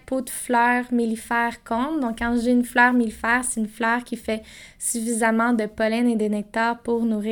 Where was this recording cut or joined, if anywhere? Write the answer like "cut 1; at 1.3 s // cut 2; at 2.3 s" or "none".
none